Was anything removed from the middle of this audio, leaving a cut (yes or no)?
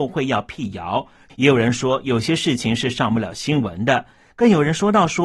yes